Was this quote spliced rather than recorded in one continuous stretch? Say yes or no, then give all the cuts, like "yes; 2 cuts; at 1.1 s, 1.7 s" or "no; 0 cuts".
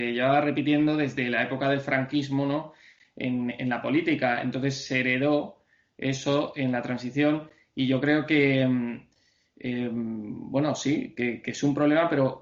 no; 0 cuts